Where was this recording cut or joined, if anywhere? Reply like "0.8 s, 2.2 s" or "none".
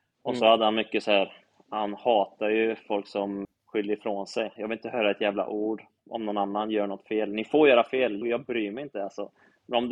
3.4 s, 4.6 s, 8.2 s